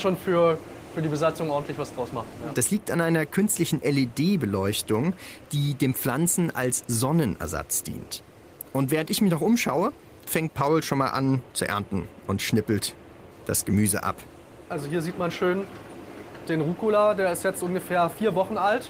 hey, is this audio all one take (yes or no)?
no